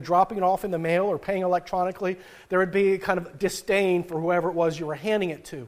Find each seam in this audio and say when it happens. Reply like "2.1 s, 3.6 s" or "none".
none